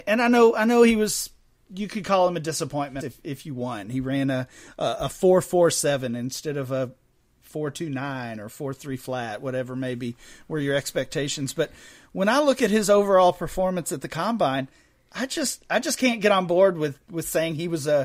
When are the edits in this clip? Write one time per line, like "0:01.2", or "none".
0:03.0